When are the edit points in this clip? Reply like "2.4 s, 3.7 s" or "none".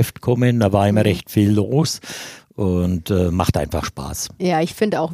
2.4 s